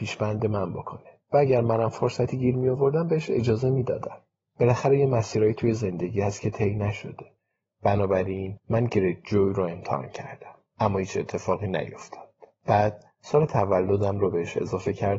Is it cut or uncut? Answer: uncut